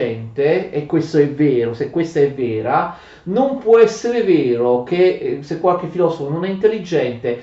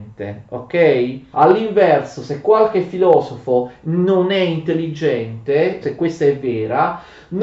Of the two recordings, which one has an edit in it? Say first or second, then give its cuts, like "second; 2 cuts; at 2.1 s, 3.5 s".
second; 2 cuts; at 1.3 s, 5.8 s